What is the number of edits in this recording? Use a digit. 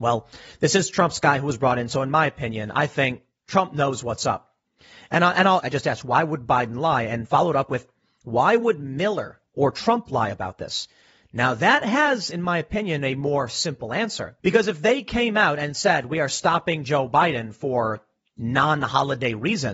2